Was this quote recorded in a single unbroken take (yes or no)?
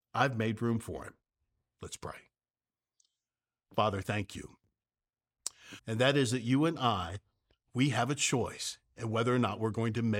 no